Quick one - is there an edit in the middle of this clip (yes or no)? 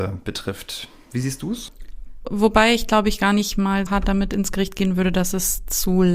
yes